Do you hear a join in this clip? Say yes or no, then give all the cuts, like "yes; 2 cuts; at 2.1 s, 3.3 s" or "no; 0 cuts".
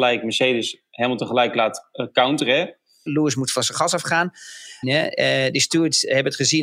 yes; 2 cuts; at 3.1 s, 4.8 s